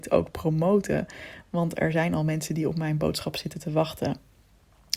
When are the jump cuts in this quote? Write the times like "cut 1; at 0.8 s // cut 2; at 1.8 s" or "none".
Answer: none